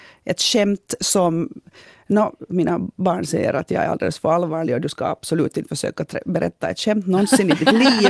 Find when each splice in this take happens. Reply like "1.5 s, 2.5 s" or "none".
none